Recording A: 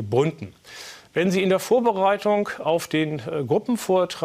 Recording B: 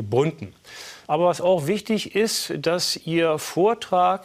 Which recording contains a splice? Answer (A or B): B